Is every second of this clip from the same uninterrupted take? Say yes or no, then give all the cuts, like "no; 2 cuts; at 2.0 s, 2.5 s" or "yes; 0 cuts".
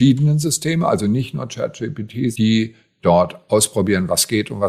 no; 1 cut; at 2.3 s